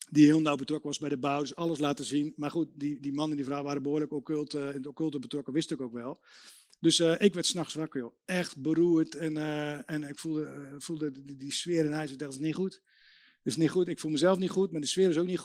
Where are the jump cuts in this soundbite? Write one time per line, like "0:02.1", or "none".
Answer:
none